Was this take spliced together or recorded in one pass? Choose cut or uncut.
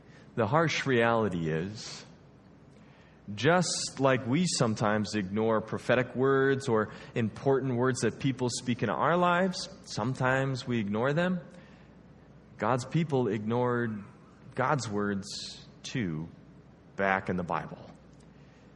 uncut